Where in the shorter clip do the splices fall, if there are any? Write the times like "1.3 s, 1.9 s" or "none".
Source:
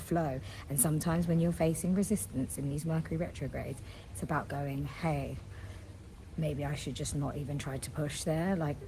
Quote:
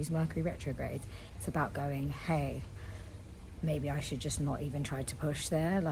none